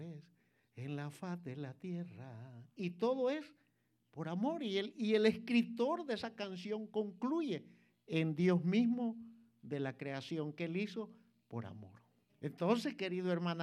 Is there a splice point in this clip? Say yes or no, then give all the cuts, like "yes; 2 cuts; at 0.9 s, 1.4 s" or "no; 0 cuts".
yes; 1 cut; at 12.3 s